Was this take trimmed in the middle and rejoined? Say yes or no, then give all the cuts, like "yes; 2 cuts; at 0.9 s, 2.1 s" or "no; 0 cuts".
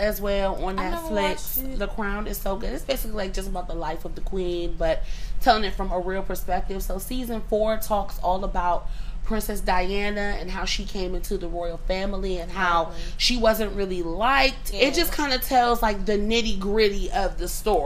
yes; 1 cut; at 14.7 s